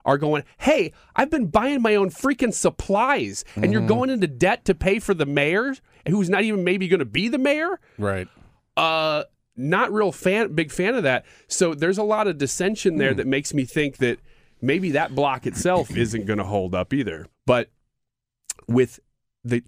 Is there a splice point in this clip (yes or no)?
yes